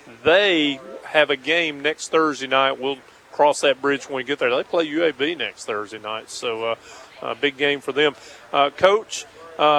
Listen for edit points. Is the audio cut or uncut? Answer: uncut